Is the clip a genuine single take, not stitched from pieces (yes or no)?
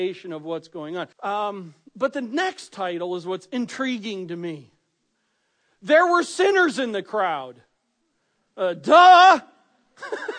no